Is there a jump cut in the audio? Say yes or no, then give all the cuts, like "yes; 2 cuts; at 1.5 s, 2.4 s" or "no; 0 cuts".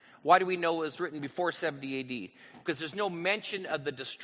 no; 0 cuts